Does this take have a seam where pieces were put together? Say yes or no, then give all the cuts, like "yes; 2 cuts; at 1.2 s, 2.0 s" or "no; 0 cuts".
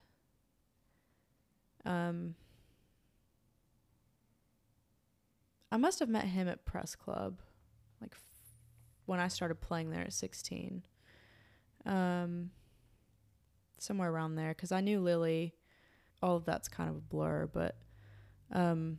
yes; 1 cut; at 16.1 s